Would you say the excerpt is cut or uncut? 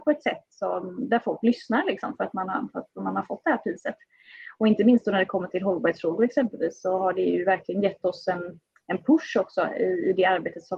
uncut